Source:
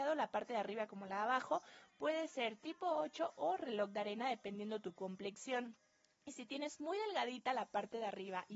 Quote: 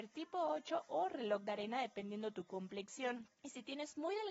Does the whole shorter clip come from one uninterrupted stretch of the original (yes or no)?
no